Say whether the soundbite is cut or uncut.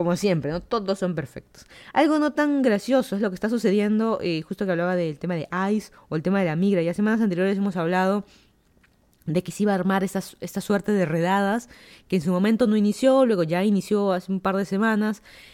uncut